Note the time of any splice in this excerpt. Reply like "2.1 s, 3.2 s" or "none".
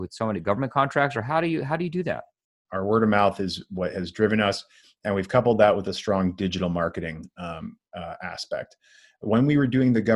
2.7 s